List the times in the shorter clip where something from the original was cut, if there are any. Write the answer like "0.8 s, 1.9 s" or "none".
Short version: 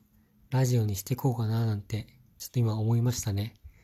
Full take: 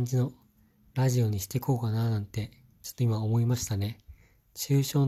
none